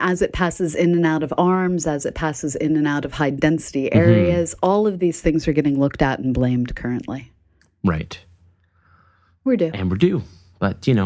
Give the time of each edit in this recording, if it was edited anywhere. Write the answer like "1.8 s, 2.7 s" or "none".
none